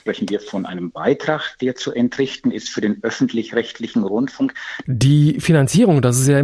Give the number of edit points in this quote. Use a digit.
1